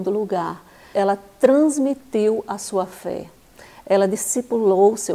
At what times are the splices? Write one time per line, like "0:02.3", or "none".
0:00.9